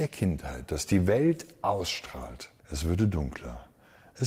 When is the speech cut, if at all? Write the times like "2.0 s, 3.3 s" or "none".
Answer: 2.6 s